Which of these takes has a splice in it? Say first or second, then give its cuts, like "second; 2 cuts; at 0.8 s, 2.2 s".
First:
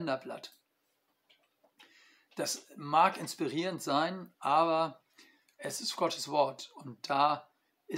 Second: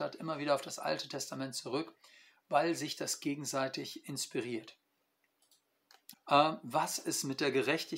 second; 1 cut; at 6.1 s